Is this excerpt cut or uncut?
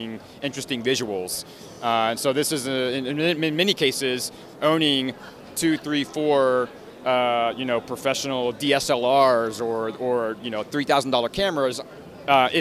uncut